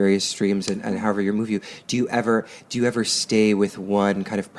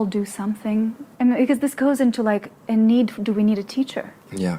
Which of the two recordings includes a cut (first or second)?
second